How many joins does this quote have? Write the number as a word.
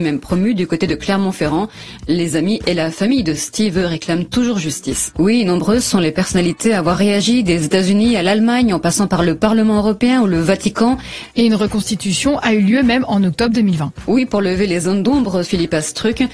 three